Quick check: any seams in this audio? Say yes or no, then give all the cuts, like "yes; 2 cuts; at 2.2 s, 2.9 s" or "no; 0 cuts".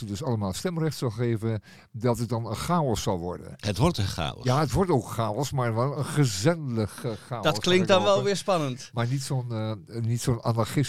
no; 0 cuts